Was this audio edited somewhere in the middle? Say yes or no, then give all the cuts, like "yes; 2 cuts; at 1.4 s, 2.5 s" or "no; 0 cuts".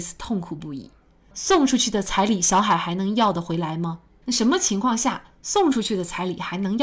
yes; 1 cut; at 4.2 s